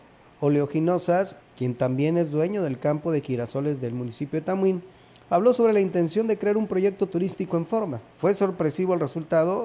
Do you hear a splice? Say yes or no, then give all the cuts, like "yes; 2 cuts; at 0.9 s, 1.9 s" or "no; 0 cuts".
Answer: yes; 2 cuts; at 1.4 s, 8.1 s